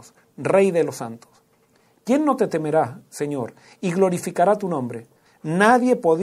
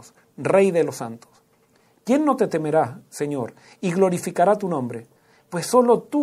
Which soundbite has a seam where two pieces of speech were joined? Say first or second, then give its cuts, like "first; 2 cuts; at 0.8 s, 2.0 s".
first; 1 cut; at 5.3 s